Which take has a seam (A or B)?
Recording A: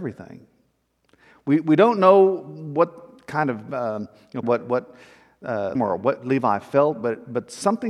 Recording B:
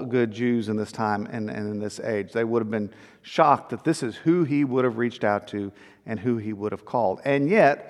A